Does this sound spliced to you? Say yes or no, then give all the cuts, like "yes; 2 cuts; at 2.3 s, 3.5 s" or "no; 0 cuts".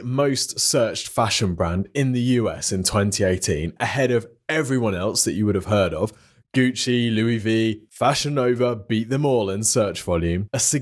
no; 0 cuts